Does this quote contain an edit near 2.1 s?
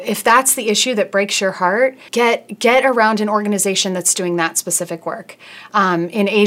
yes; 1 cut; at 2.1 s

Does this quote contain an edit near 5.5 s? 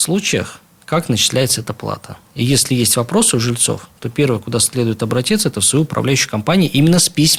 no; 0 cuts

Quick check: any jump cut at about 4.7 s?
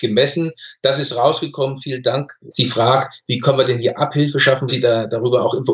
yes; 2 cuts; at 2.5 s, 4.7 s

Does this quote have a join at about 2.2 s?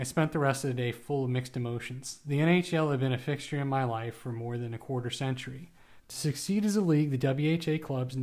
no; 1 cut; at 6.0 s

